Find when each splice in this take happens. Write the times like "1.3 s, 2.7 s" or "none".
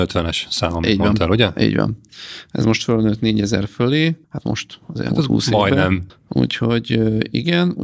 4.2 s, 6.1 s